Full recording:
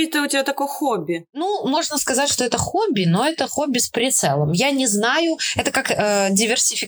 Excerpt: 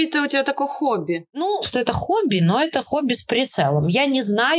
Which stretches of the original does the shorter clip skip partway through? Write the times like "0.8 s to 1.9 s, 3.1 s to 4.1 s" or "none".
1.6 s to 2.3 s